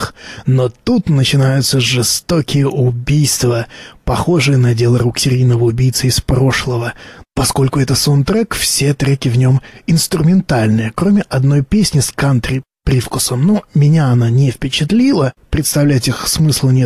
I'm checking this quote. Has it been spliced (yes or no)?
yes